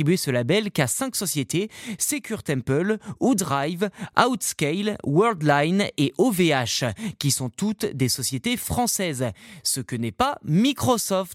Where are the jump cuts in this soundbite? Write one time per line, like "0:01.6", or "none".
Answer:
none